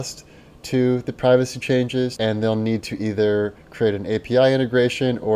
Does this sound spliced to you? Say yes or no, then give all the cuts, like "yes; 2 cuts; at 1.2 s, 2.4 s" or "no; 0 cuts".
yes; 1 cut; at 2.2 s